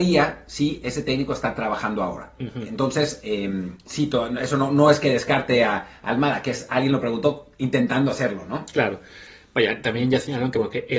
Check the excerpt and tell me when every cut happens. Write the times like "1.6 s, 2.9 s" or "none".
none